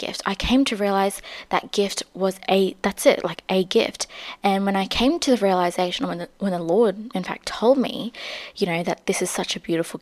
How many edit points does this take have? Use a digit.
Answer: 1